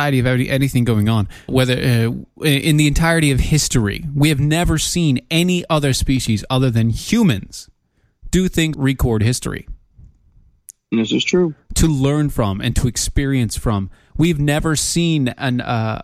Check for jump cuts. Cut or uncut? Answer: cut